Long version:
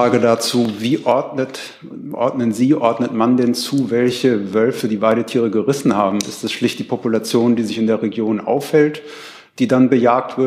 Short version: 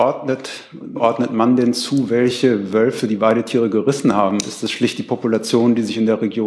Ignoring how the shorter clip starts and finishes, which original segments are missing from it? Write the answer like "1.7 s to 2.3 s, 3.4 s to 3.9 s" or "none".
2.0 s to 2.8 s